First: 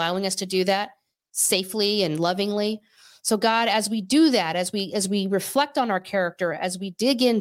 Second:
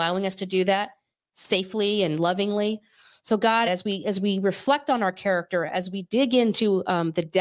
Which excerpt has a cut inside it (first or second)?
second